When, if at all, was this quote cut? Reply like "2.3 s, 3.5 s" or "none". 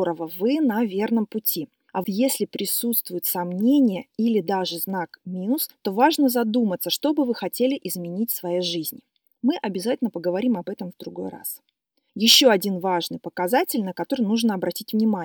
2.0 s